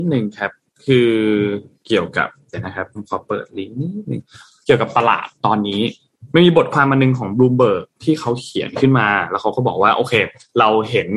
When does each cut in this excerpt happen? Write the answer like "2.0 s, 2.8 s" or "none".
none